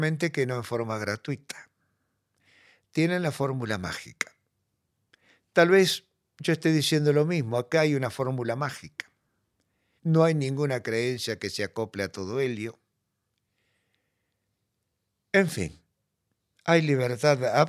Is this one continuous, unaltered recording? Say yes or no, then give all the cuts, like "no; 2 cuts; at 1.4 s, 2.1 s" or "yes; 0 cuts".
no; 1 cut; at 10.0 s